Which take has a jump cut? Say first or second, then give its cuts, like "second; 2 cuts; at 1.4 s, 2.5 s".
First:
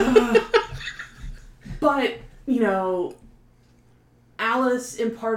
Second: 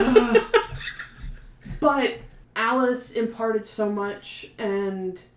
second; 1 cut; at 2.4 s